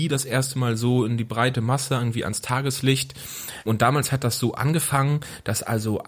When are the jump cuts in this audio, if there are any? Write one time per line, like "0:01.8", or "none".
0:03.7